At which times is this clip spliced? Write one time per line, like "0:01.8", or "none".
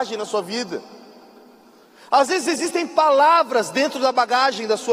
none